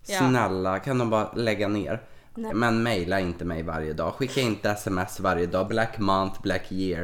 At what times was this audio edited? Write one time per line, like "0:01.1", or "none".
0:02.5
0:05.7